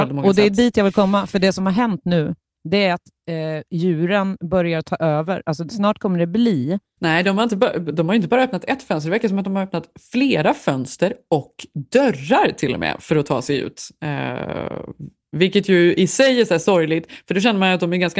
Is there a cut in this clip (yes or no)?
yes